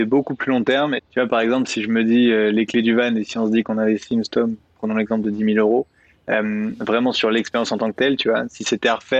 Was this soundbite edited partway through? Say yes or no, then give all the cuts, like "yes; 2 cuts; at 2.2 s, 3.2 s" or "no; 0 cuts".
yes; 1 cut; at 1.0 s